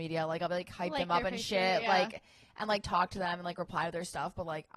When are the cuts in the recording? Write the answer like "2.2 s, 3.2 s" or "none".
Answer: none